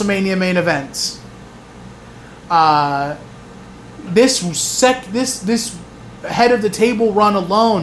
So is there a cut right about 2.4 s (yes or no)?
no